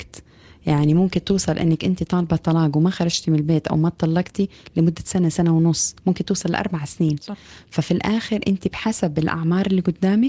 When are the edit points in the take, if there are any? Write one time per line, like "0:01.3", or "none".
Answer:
none